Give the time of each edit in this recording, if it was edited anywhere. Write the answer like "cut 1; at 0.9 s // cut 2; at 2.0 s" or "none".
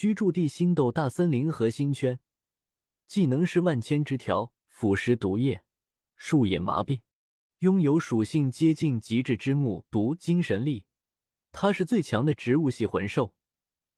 cut 1; at 7.5 s